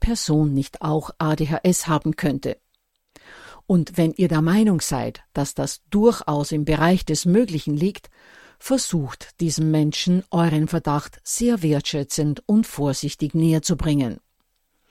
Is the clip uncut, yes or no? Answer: yes